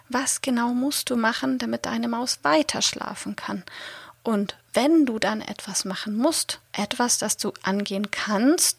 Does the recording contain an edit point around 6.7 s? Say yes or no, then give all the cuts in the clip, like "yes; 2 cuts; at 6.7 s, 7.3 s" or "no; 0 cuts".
yes; 1 cut; at 6.7 s